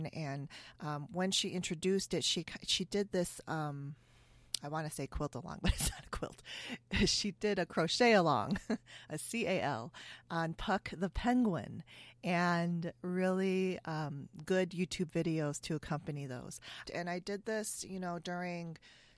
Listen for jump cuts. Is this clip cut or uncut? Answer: cut